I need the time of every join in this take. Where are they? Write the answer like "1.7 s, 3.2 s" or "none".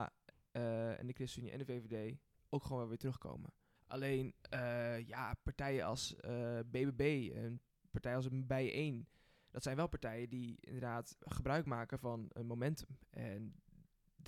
3.8 s, 11.2 s

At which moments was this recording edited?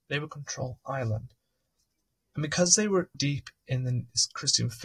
3.1 s

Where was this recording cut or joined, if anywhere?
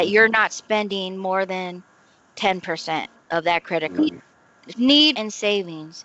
4.0 s, 5.1 s

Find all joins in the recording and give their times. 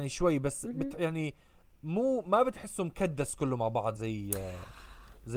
4.0 s

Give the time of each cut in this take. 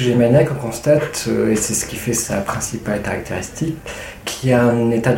none

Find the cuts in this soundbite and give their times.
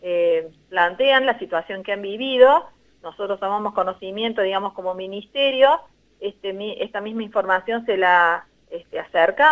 none

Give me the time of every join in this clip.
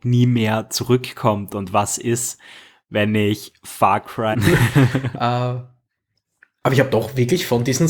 4.3 s

